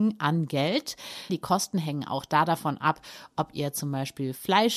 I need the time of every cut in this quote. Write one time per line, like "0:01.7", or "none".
0:01.3